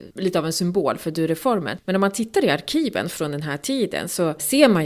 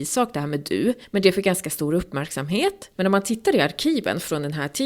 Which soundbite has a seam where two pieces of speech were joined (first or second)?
second